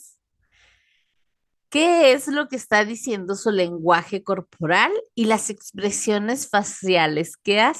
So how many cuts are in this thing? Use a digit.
0